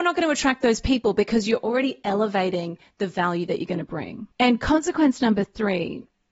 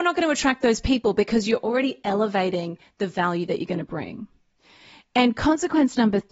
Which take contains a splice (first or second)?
first